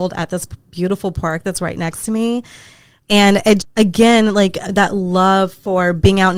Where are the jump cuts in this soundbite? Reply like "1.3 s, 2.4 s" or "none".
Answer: 3.6 s